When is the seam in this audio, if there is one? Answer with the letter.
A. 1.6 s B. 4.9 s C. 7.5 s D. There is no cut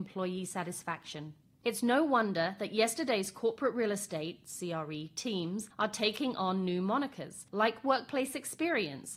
A